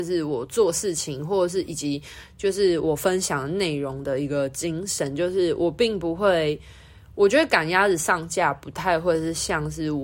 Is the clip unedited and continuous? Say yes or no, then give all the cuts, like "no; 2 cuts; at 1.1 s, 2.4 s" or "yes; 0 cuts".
yes; 0 cuts